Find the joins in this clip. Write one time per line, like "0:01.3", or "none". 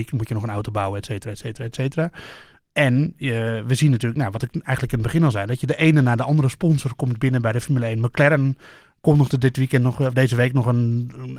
none